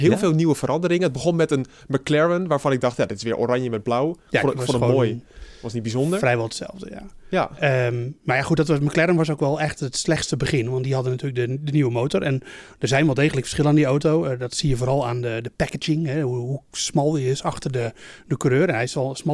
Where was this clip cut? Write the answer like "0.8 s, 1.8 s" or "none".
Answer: none